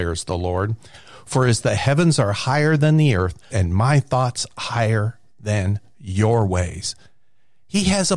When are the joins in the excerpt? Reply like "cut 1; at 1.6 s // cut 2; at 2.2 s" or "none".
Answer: cut 1; at 3.5 s